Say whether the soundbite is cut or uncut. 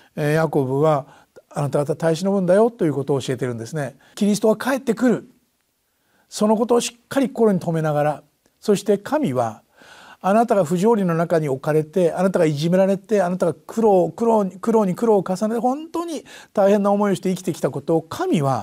cut